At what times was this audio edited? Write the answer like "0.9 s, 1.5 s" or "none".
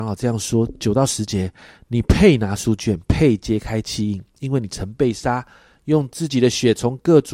none